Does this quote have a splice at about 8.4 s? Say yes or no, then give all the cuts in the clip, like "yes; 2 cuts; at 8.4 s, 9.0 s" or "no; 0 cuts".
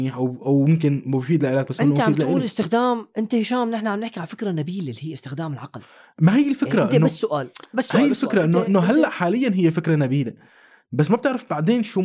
no; 0 cuts